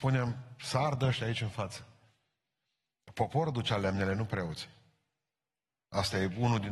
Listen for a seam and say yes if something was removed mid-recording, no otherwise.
no